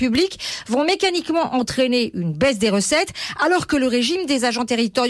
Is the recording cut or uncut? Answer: uncut